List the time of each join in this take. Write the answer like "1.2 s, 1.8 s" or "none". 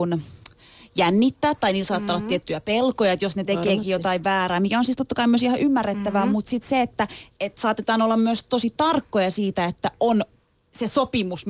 none